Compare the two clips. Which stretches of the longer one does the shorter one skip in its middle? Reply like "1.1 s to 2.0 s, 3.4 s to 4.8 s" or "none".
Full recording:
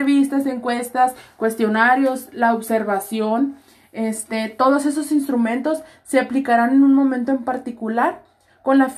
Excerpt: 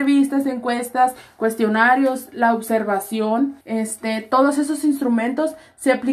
3.6 s to 3.9 s